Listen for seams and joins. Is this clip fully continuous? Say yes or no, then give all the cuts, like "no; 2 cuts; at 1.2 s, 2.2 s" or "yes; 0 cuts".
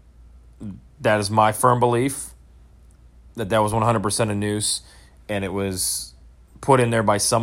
yes; 0 cuts